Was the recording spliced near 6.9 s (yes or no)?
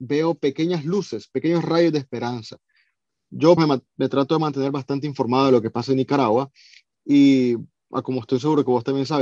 no